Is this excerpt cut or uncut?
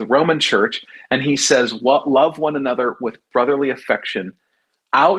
uncut